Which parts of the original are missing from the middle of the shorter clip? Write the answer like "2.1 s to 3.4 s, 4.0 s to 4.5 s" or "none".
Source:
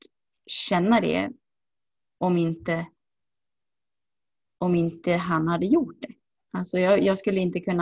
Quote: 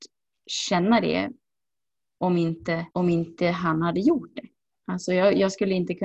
2.9 s to 4.6 s

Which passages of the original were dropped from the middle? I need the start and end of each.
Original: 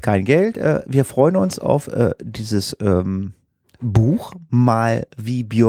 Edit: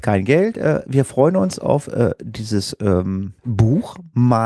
3.4 s to 3.7 s

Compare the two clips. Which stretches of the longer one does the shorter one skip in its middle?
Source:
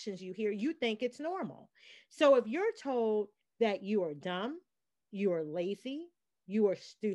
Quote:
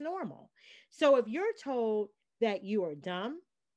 none

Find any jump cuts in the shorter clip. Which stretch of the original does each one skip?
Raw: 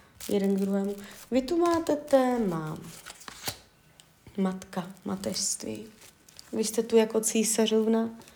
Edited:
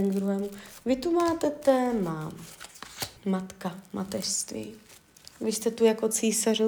3.6 s to 4.3 s

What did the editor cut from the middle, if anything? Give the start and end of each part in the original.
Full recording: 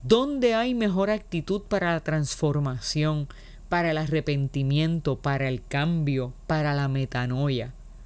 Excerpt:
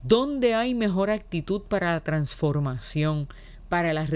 none

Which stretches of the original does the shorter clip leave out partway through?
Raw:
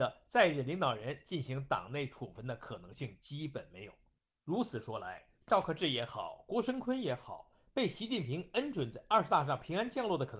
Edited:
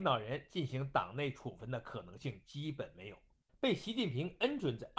4.3 s to 7.6 s

